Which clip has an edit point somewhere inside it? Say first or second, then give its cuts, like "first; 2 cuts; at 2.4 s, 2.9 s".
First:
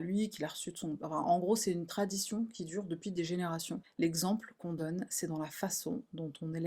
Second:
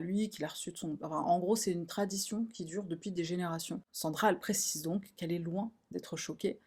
first; 1 cut; at 3.8 s